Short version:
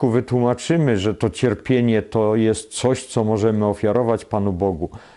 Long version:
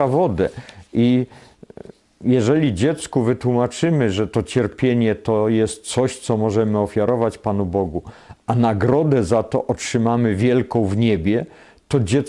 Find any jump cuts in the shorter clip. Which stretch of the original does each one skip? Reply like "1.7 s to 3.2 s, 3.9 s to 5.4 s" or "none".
none